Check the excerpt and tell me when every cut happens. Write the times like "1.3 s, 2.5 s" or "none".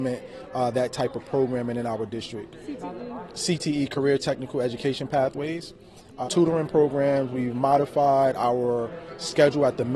6.2 s